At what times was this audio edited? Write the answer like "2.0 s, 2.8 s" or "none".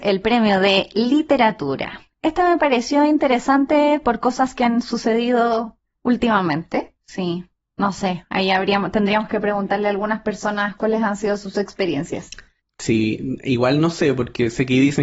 7.0 s